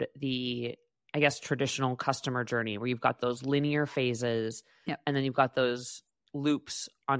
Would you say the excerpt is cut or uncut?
uncut